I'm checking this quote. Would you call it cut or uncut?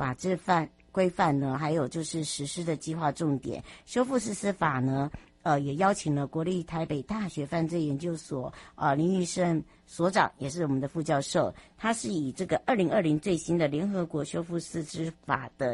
uncut